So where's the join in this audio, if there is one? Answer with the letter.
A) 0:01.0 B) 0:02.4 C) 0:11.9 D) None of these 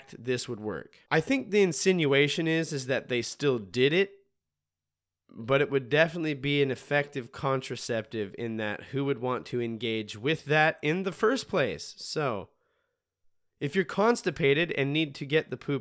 A